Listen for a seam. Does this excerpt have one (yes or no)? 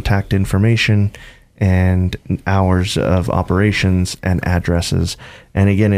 no